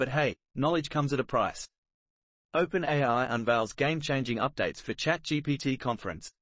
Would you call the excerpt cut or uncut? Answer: uncut